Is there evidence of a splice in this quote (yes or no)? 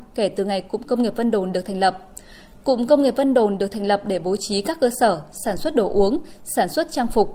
no